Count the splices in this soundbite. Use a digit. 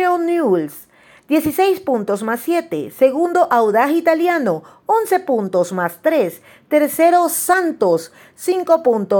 0